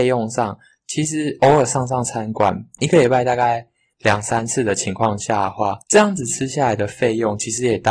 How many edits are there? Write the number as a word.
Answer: one